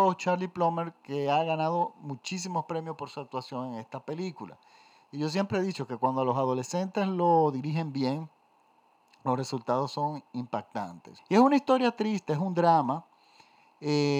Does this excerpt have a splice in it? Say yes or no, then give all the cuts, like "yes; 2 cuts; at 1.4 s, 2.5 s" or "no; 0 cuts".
yes; 1 cut; at 11.2 s